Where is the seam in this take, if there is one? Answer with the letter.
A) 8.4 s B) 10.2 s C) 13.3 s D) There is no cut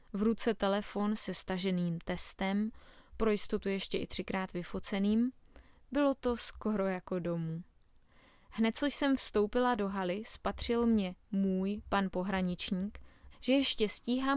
C